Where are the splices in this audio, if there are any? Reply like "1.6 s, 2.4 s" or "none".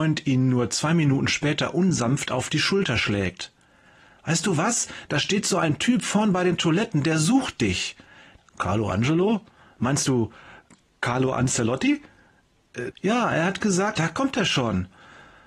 8.4 s, 12.9 s, 14.0 s